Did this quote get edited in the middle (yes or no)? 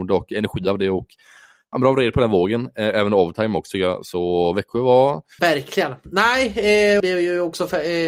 yes